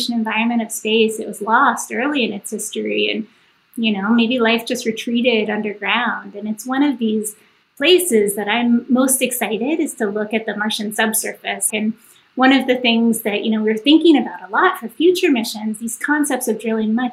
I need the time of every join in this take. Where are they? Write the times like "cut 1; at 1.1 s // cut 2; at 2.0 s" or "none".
cut 1; at 11.7 s